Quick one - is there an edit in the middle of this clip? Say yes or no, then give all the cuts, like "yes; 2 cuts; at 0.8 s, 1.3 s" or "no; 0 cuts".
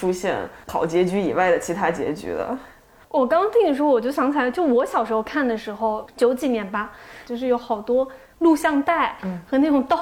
yes; 1 cut; at 7.3 s